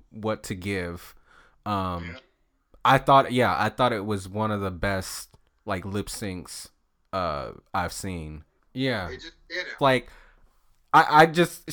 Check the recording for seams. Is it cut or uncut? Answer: cut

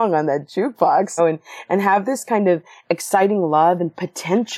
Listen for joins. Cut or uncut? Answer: cut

